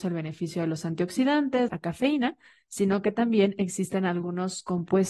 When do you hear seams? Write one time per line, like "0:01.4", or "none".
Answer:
0:01.7